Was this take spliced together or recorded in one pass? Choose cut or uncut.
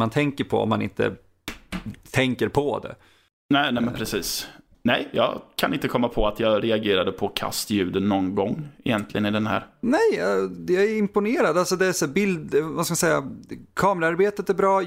cut